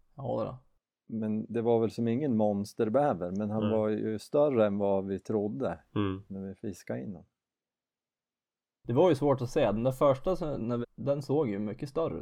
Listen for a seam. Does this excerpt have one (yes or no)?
yes